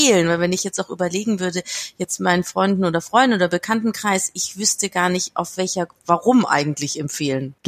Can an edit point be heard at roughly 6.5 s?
no; 0 cuts

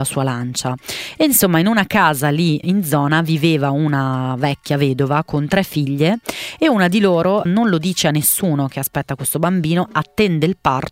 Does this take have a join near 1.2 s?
no; 2 cuts; at 2.6 s, 7.5 s

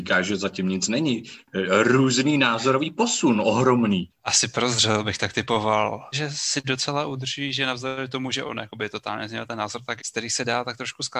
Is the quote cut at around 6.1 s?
yes; 3 cuts; at 4.2 s, 6.1 s, 10.0 s

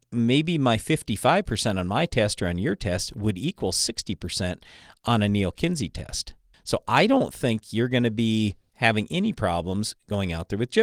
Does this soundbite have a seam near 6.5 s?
yes; 1 cut; at 6.5 s

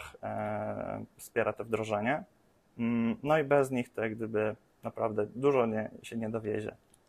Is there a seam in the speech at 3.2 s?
no; 0 cuts

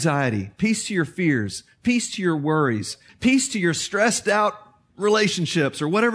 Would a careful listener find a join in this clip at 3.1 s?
yes; 1 cut; at 3.1 s

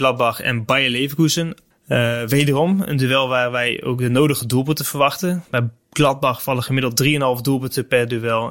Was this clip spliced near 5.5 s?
no; 1 cut; at 1.7 s

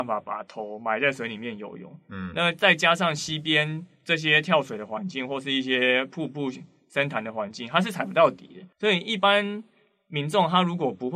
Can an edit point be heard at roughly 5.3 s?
no; 1 cut; at 8.7 s

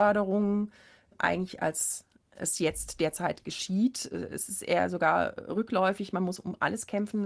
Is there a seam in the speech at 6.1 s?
no; 0 cuts

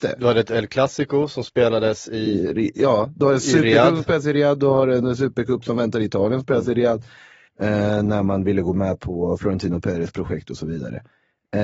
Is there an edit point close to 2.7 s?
no; 1 cut; at 7.5 s

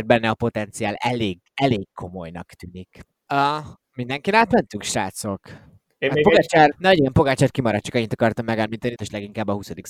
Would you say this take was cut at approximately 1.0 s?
no; 3 cuts; at 3.3 s, 6.7 s, 9.0 s

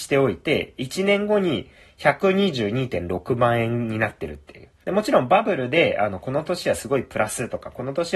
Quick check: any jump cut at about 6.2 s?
no; 1 cut; at 4.8 s

